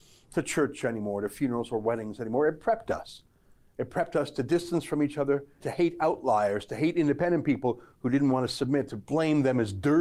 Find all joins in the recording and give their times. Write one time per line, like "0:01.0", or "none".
0:05.6